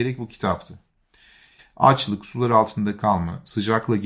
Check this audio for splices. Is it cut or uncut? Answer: cut